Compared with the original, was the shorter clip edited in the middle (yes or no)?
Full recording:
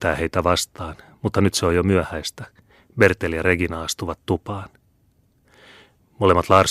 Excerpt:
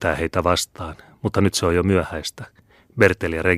no